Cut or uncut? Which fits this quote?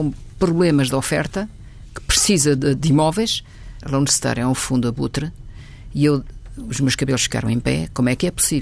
cut